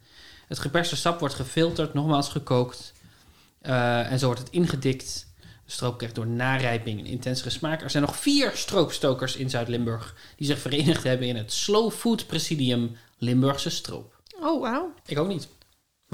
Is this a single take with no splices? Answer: no; 2 cuts; at 5.4 s, 15.0 s

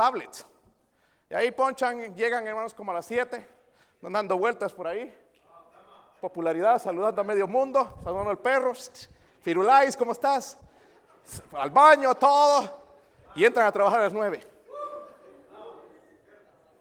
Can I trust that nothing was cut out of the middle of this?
yes; 0 cuts

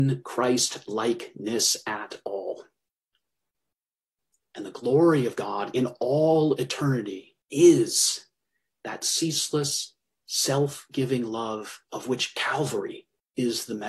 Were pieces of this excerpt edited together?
yes; 2 cuts; at 7.4 s, 11.8 s

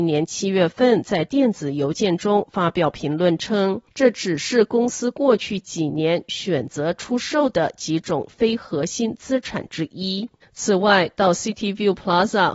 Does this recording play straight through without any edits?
no; 2 cuts; at 3.9 s, 10.4 s

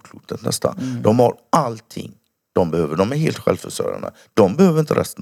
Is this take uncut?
yes; 0 cuts

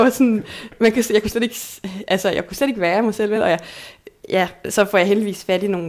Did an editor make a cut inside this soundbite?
no; 0 cuts

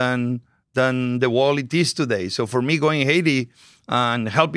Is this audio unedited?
yes; 0 cuts

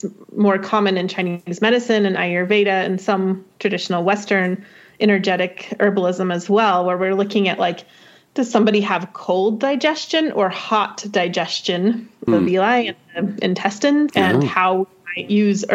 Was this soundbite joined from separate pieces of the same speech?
yes; 2 cuts; at 12.3 s, 14.1 s

